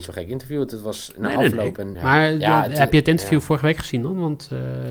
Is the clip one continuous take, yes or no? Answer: no